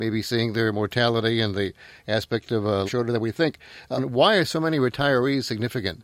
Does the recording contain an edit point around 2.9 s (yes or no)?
yes